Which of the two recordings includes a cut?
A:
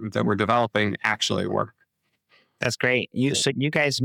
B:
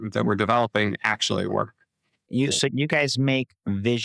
B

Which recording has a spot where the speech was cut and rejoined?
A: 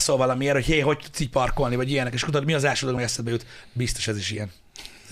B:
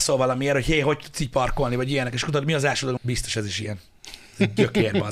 B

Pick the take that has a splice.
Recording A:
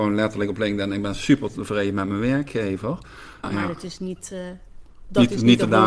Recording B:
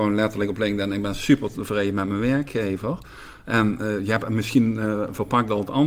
A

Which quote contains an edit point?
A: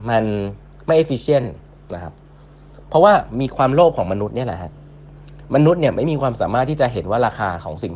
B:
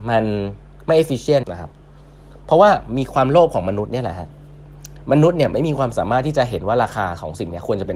B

